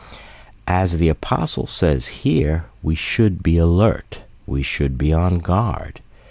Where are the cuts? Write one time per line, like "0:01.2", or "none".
0:04.4

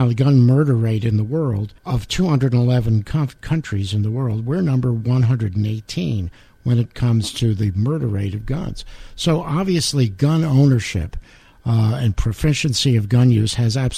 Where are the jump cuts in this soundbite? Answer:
0:01.8

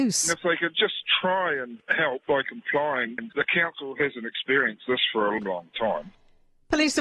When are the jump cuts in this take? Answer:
0:03.2
0:05.4

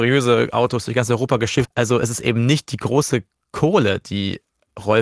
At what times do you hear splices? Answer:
0:01.6

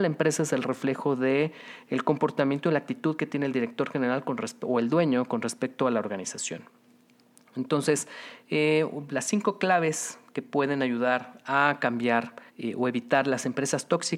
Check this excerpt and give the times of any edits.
0:12.5

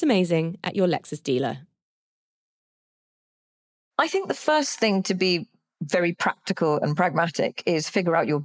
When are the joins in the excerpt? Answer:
none

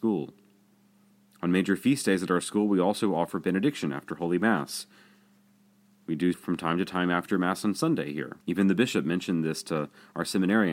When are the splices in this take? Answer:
0:06.3
0:08.4

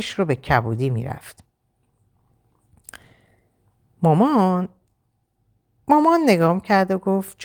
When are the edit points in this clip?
none

